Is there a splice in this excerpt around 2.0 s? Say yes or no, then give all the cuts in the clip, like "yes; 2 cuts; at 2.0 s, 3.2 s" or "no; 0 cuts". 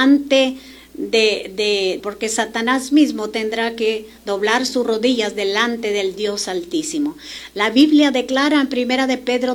yes; 1 cut; at 2.0 s